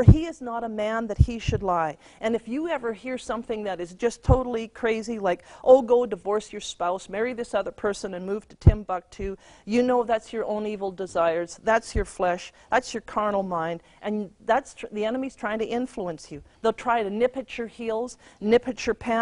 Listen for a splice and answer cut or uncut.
cut